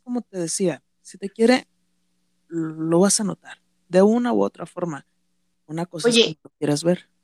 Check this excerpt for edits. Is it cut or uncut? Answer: cut